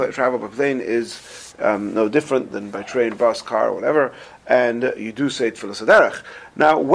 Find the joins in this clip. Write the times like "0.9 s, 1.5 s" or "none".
none